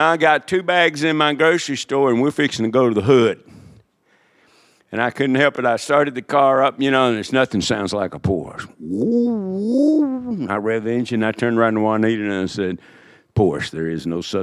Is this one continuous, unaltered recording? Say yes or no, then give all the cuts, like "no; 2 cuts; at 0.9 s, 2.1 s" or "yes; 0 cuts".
yes; 0 cuts